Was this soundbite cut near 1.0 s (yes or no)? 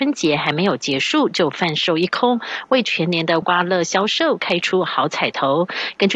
no